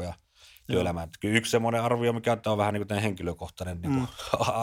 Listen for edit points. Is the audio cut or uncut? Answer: uncut